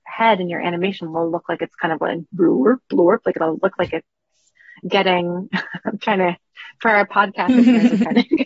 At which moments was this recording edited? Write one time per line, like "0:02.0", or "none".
none